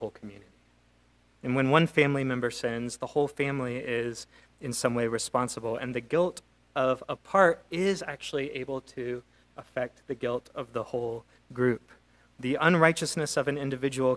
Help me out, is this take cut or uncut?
uncut